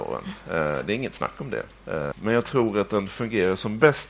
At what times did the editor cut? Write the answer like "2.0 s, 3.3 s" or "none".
2.1 s